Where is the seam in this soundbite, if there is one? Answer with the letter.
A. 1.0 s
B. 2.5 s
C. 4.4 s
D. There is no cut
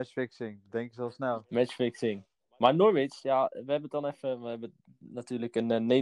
D